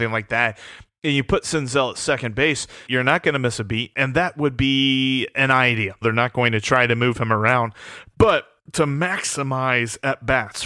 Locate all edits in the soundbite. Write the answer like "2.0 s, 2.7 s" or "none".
2.9 s, 3.9 s, 6.0 s